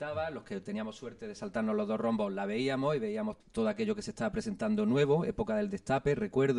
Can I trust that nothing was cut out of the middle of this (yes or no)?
no